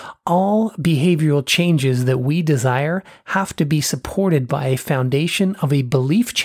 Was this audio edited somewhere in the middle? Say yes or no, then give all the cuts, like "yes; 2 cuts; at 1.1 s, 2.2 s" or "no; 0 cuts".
no; 0 cuts